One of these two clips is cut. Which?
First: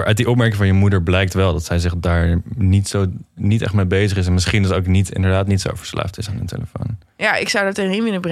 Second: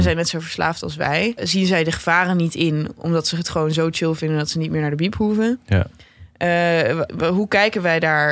second; 2 cuts; at 1.4 s, 7.1 s

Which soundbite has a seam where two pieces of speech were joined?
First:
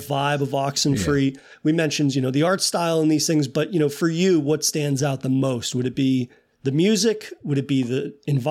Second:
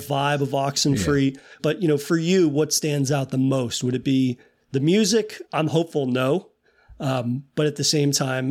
second; 2 cuts; at 1.6 s, 5.4 s

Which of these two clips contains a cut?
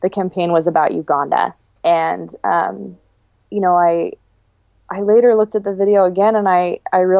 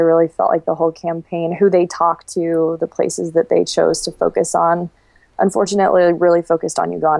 first; 1 cut; at 1.6 s

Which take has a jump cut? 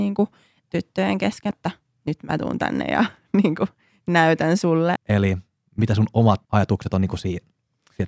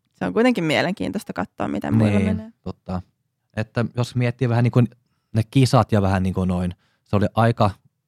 first; 3 cuts; at 1.5 s, 5.0 s, 6.4 s

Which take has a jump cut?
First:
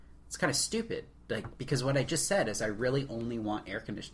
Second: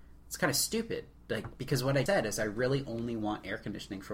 second; 1 cut; at 2.1 s

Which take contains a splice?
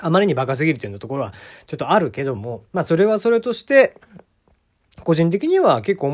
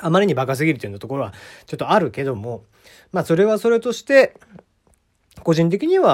first; 1 cut; at 2.7 s

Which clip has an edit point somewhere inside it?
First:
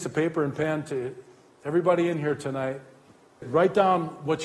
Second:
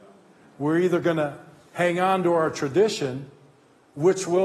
first; 1 cut; at 3.4 s

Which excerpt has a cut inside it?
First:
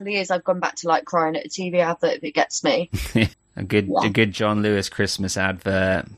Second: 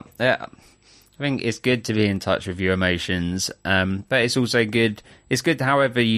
first; 1 cut; at 3.3 s

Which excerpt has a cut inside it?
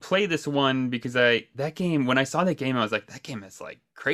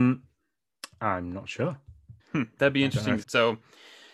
second; 2 cuts; at 2.2 s, 3.2 s

